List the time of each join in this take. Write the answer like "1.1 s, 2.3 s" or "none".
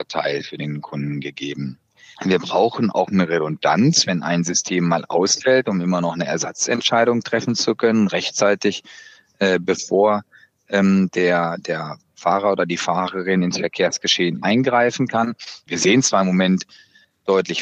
2.1 s, 15.7 s